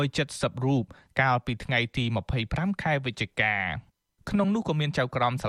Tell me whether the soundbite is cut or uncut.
uncut